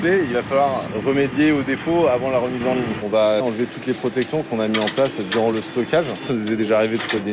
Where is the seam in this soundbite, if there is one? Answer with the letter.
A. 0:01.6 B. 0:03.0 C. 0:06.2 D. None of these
B